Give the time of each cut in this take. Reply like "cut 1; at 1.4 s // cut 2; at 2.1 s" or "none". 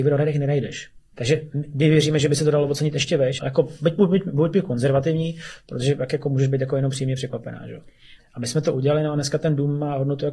cut 1; at 1.1 s // cut 2; at 3.4 s // cut 3; at 8.2 s